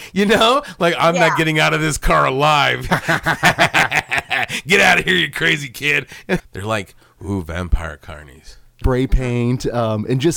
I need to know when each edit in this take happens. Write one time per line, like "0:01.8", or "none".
0:02.9
0:06.4
0:08.8